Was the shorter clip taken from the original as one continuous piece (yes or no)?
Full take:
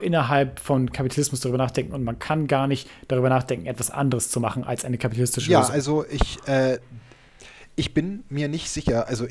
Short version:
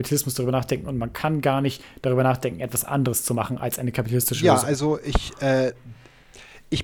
yes